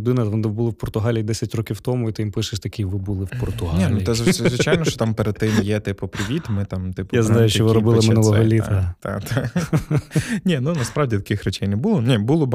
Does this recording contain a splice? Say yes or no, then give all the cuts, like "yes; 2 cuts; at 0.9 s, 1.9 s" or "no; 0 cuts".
no; 0 cuts